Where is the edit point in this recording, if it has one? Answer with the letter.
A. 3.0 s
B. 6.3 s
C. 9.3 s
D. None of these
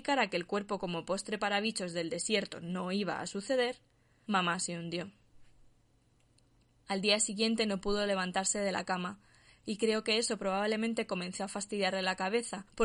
D